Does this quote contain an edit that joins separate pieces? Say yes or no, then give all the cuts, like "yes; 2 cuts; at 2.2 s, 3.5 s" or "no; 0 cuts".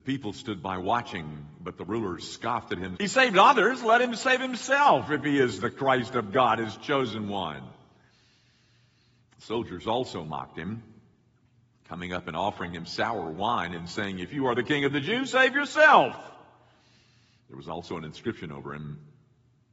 yes; 1 cut; at 3.0 s